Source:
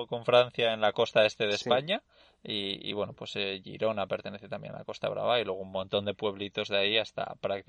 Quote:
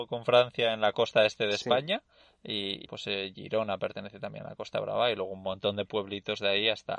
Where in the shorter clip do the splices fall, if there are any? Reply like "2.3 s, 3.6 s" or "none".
2.9 s